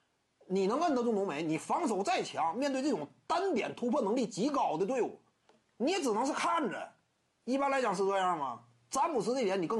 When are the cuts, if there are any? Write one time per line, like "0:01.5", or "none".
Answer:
none